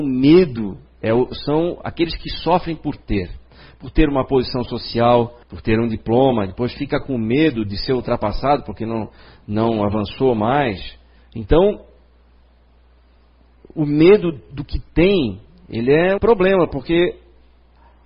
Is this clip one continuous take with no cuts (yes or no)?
no